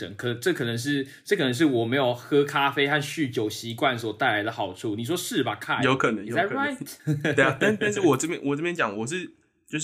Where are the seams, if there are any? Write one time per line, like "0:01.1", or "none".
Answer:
none